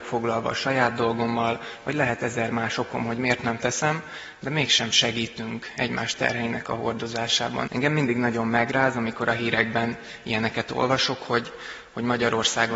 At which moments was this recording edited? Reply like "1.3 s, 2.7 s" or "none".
7.7 s